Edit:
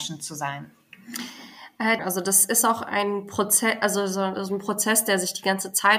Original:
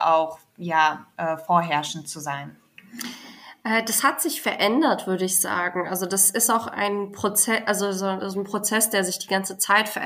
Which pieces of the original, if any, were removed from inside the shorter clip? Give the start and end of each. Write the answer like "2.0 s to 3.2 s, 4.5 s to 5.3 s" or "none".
3.8 s to 5.8 s